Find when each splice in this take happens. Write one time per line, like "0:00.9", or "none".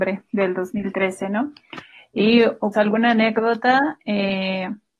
0:02.7